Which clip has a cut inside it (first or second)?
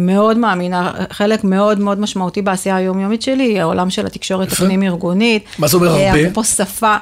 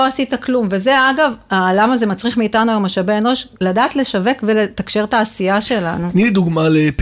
second